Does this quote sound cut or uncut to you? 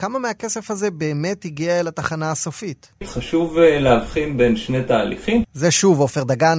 cut